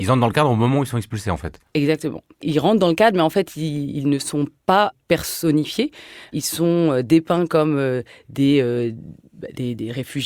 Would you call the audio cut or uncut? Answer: uncut